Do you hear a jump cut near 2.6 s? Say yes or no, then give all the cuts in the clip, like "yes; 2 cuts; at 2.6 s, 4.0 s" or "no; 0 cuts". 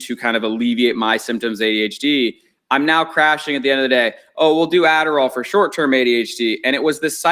yes; 1 cut; at 2.6 s